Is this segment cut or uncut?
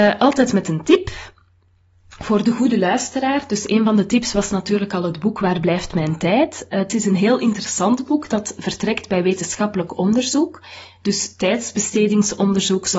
uncut